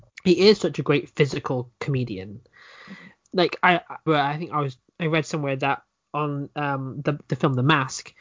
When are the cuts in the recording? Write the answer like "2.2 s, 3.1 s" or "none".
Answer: 4.1 s